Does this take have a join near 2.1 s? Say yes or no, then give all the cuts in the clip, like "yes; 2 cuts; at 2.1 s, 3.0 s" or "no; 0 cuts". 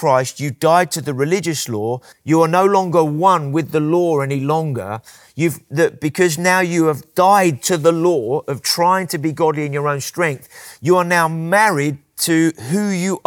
yes; 1 cut; at 2.1 s